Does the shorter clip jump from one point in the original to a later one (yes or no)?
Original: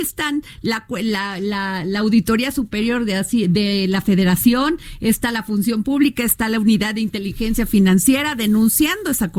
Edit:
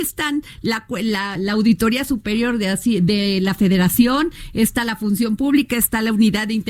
yes